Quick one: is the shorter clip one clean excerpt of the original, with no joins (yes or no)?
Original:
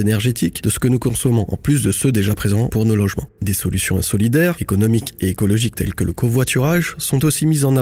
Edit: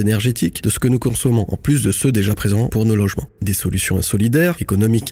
yes